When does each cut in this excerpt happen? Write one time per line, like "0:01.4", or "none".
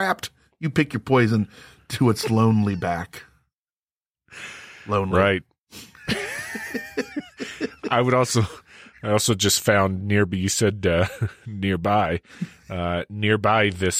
none